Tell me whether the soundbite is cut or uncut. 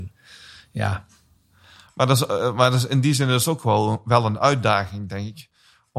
uncut